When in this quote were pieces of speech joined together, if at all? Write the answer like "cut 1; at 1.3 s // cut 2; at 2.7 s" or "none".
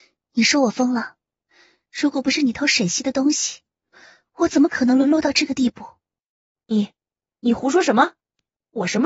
none